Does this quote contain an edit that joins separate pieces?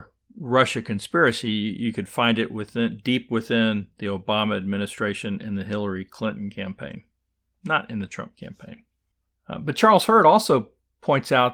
no; 0 cuts

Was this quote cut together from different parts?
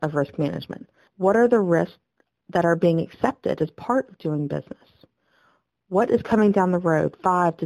yes; 1 cut; at 1.1 s

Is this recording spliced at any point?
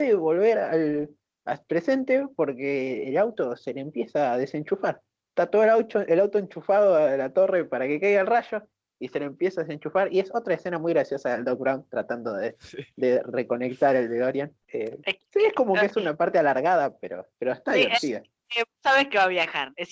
yes; 2 cuts; at 14.6 s, 17.3 s

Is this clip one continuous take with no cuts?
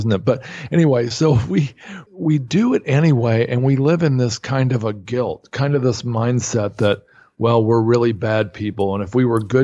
no; 1 cut; at 2.1 s

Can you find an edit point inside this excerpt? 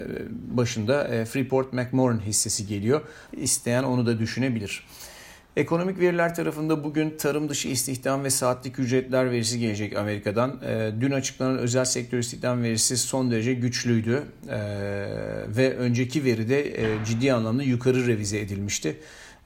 yes; 1 cut; at 3.3 s

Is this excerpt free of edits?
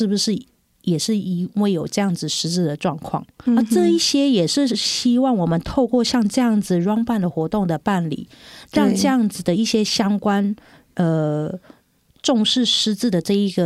no; 1 cut; at 3.5 s

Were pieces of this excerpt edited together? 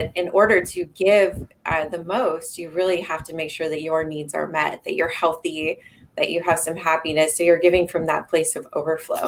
no; 0 cuts

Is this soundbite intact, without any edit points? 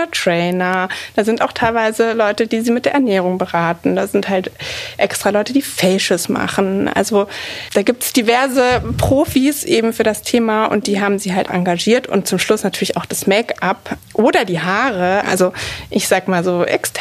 no; 2 cuts; at 11.5 s, 15.2 s

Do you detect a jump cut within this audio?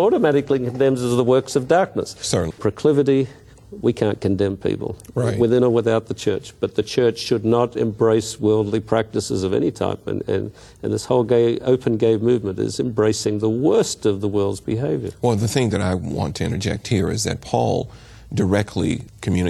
yes; 1 cut; at 2.5 s

